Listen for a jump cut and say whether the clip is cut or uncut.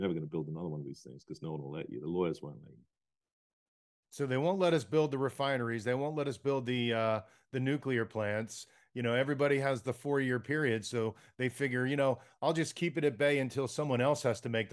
uncut